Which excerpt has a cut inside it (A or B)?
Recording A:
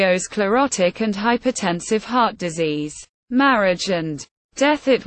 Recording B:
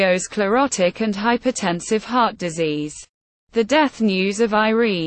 A